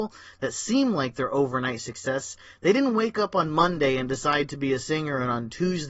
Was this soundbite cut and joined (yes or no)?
no